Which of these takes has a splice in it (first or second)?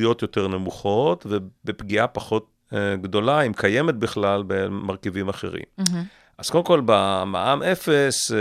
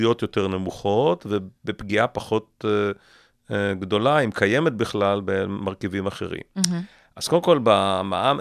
first